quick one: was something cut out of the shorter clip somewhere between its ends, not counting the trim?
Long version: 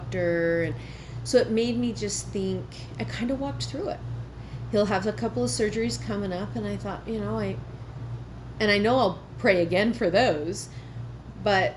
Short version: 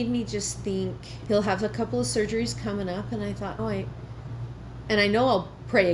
yes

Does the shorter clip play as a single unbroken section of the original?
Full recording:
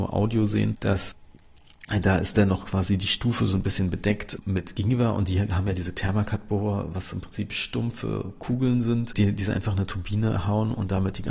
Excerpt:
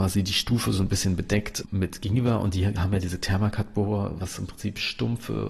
yes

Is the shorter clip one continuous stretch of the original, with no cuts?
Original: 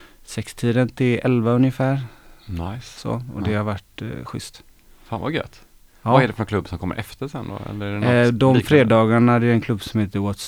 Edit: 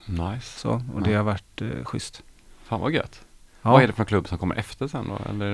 yes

